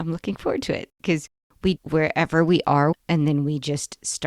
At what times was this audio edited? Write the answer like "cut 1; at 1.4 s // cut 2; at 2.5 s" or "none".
cut 1; at 1.8 s // cut 2; at 2.9 s